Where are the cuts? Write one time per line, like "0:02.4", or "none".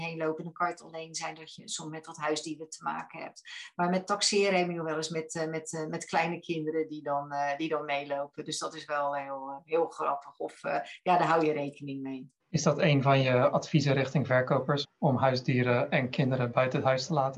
0:12.4
0:14.8